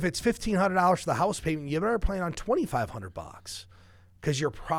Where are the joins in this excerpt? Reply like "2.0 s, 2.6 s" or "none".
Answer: none